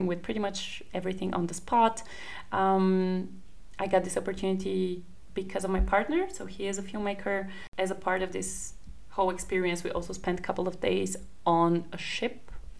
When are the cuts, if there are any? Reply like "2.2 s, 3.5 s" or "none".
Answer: none

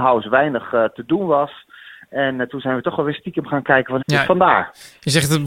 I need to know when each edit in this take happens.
4.0 s

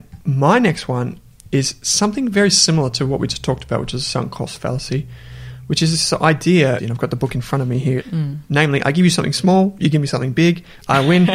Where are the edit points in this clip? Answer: 6.8 s, 8.0 s

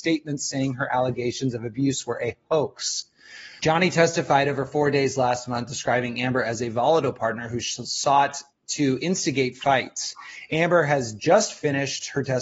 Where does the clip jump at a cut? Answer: 3.6 s

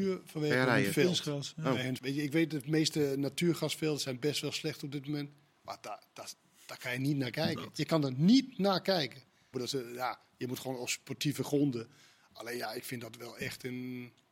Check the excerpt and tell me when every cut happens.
2.0 s, 9.5 s

